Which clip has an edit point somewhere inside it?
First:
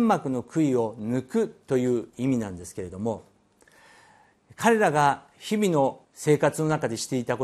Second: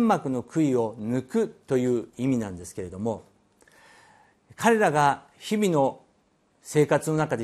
first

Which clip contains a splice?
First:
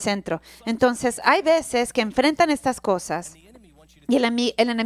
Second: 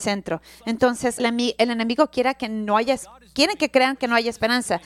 second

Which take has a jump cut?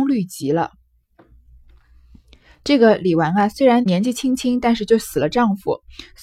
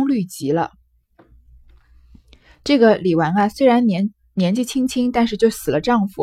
first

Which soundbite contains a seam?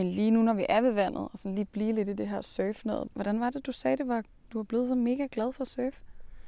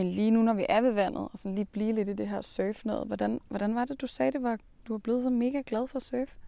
first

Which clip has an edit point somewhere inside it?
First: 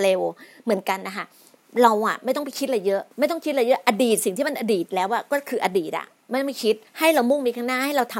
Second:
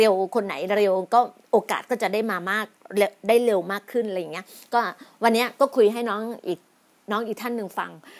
first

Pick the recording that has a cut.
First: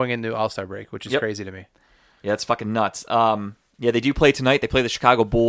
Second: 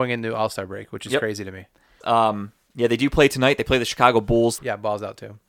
second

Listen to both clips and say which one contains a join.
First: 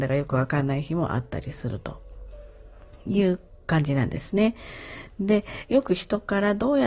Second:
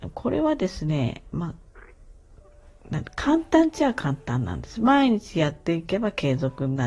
first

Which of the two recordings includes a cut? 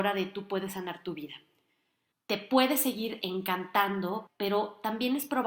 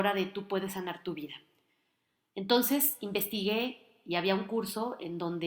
first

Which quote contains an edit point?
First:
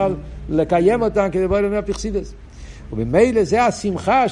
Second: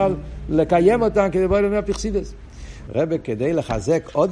second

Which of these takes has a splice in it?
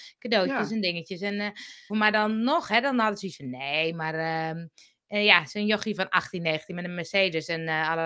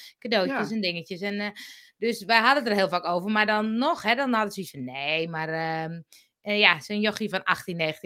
first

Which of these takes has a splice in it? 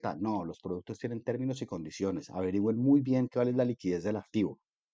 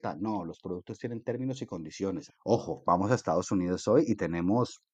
second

